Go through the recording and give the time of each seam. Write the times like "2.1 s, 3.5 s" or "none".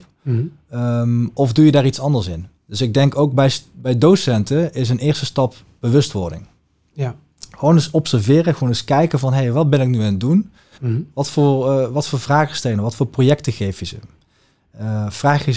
10.8 s